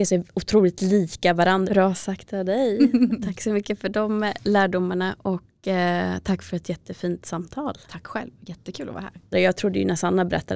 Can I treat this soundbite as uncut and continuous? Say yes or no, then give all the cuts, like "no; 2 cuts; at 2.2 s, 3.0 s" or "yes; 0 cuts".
no; 2 cuts; at 1.7 s, 9.3 s